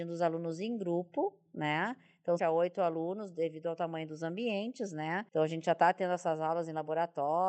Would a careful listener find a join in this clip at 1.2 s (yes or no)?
no